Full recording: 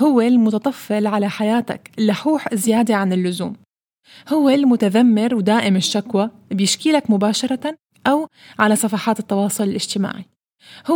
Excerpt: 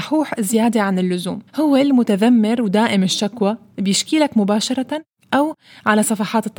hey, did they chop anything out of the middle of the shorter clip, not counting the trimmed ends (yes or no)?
yes